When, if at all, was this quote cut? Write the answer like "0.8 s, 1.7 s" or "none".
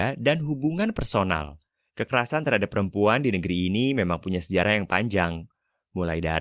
1.9 s